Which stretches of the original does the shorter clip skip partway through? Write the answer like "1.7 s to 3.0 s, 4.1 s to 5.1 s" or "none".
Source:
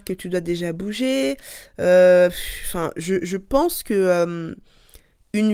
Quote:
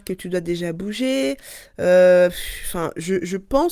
none